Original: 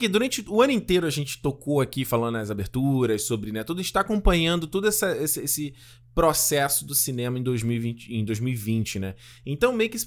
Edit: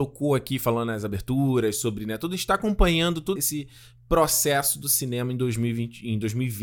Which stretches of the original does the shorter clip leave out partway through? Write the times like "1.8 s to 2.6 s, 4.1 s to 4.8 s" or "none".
4.8 s to 5.4 s